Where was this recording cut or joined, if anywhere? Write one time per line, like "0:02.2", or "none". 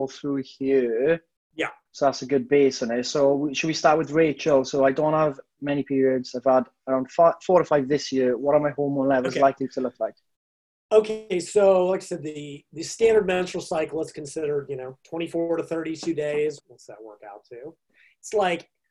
0:16.6